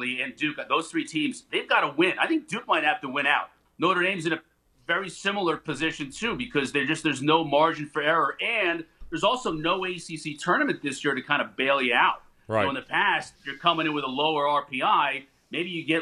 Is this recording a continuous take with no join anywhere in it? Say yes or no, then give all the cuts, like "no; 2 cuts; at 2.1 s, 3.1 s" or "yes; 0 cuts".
no; 2 cuts; at 3.6 s, 13.3 s